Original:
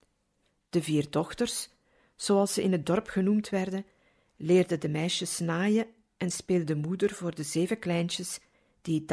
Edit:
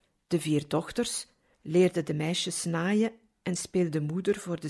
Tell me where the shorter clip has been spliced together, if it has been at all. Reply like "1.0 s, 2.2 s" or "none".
1.5 s